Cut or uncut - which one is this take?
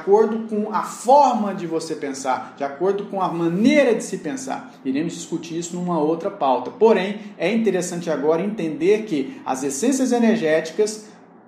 uncut